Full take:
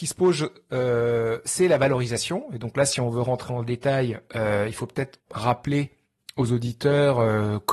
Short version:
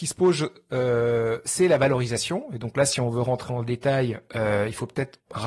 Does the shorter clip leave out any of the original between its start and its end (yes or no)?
no